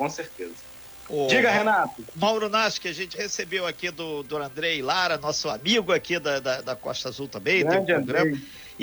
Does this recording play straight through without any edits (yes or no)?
yes